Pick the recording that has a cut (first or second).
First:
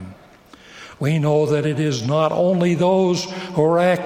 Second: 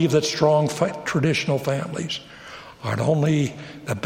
first